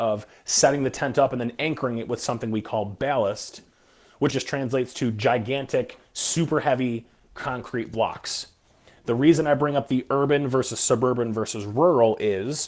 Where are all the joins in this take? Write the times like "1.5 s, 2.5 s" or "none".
4.3 s